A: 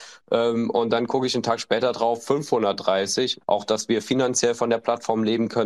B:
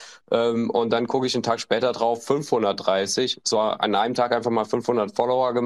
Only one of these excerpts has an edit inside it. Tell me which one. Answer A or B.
A